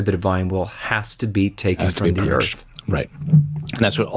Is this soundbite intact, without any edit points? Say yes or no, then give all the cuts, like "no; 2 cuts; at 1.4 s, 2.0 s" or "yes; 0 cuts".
yes; 0 cuts